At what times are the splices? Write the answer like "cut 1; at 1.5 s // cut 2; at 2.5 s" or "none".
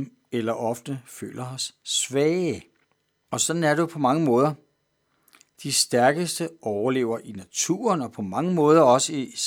cut 1; at 3.3 s

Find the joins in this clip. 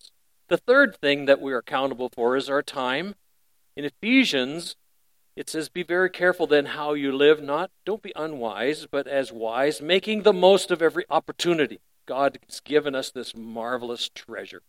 cut 1; at 11.9 s

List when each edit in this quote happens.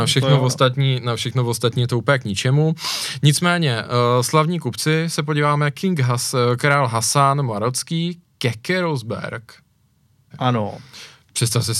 cut 1; at 10.3 s

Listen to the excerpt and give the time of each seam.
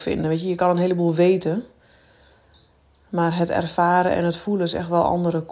none

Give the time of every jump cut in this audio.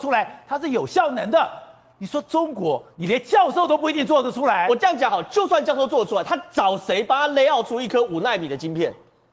none

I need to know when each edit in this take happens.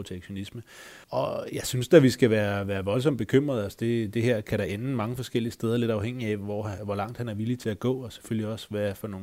cut 1; at 1.0 s

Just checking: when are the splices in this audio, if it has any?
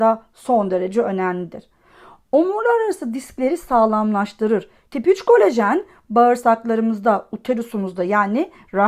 cut 1; at 4.9 s

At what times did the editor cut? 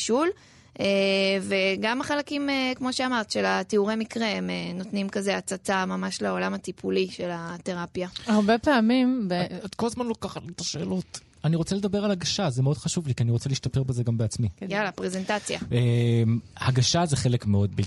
none

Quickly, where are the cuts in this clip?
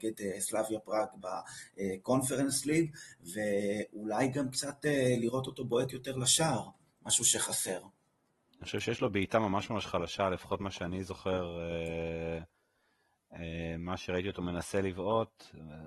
none

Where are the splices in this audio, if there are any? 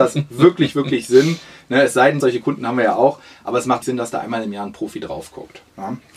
cut 1; at 2.2 s // cut 2; at 3.8 s

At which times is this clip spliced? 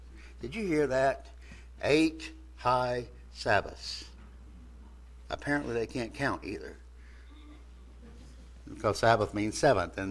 none

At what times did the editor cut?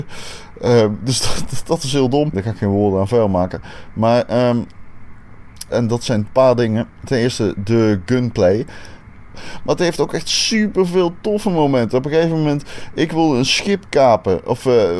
cut 1; at 2.3 s // cut 2; at 5.7 s // cut 3; at 9.3 s

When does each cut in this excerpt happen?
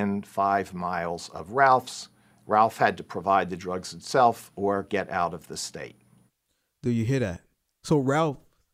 cut 1; at 2.3 s

